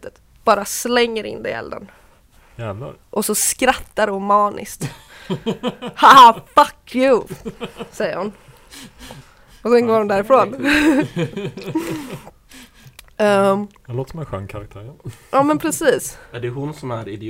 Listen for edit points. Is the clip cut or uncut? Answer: uncut